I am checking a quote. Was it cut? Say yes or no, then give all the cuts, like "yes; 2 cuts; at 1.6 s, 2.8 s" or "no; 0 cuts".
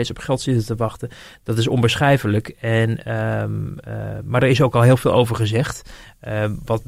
no; 0 cuts